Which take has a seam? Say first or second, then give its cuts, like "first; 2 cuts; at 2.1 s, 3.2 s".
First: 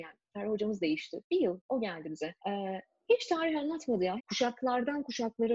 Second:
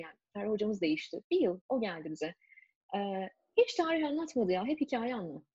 first; 2 cuts; at 2.4 s, 4.2 s